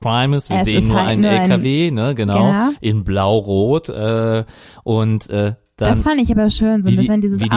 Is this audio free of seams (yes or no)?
yes